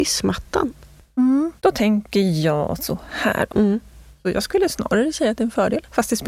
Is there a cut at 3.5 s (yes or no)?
yes